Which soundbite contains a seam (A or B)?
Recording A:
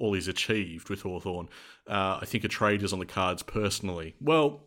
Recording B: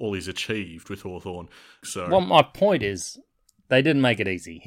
B